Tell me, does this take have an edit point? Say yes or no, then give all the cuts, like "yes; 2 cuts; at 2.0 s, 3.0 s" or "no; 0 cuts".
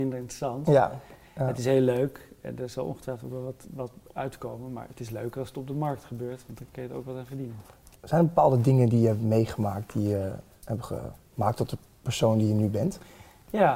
no; 0 cuts